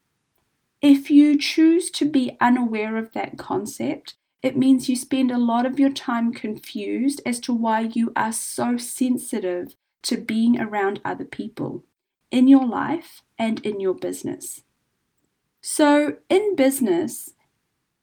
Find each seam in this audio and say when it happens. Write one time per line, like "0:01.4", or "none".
0:15.4